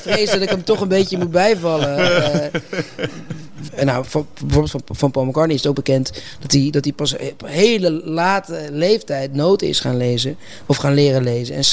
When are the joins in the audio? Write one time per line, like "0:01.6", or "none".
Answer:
0:03.7

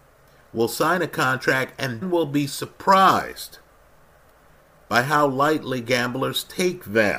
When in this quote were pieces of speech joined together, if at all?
0:02.0

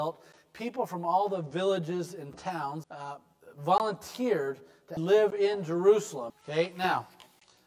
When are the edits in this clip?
0:02.8
0:05.0
0:06.3

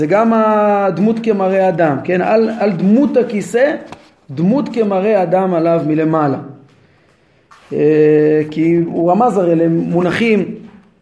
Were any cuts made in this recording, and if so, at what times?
none

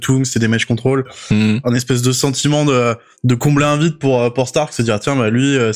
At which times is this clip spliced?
0:01.6

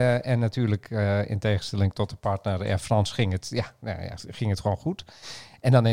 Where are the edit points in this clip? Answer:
none

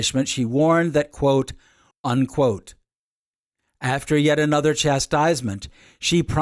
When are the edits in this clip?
0:01.9

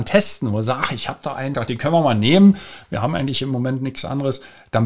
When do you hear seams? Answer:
0:01.5

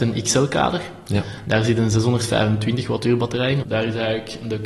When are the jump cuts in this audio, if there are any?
0:03.6

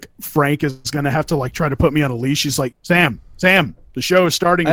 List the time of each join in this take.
0:02.7

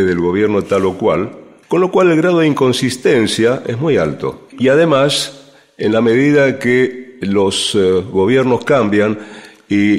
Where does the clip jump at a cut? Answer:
0:03.6

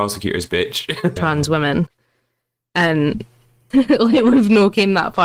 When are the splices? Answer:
0:01.2
0:03.7

